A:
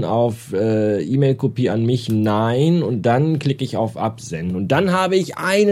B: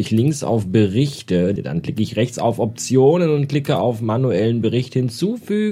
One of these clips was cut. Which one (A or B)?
B